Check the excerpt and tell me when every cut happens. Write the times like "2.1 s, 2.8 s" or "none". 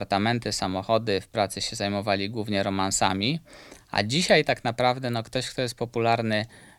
none